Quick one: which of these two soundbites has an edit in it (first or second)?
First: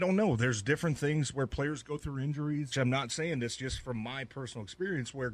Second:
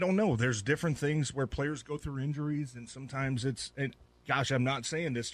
first